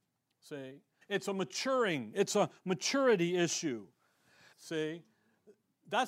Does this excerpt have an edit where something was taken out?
yes; 2 cuts; at 1.0 s, 4.5 s

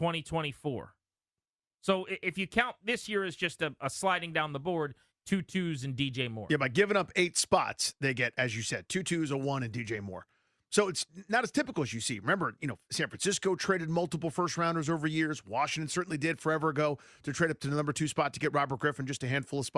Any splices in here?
yes; 1 cut; at 5.1 s

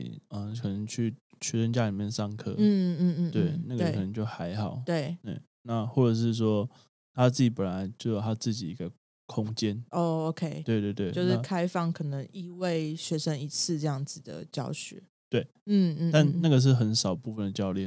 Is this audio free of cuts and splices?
yes; 0 cuts

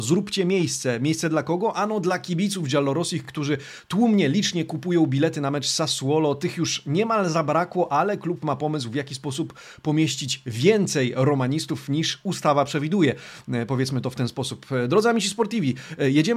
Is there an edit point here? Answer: no; 0 cuts

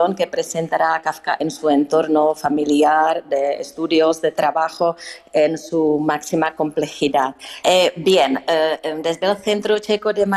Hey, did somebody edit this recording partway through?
yes; 1 cut; at 7.6 s

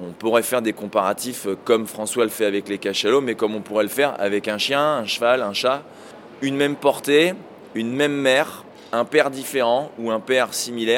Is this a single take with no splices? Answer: yes; 0 cuts

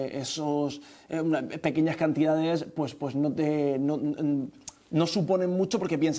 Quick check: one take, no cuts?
yes; 0 cuts

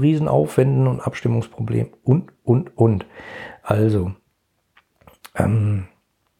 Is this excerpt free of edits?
yes; 0 cuts

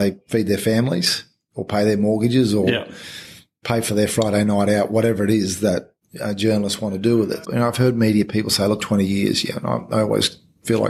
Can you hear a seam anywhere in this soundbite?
yes; 2 cuts; at 7.4 s, 8.8 s

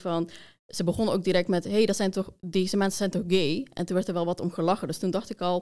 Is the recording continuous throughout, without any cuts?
yes; 0 cuts

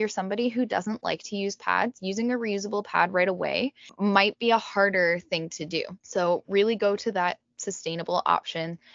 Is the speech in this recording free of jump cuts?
yes; 0 cuts

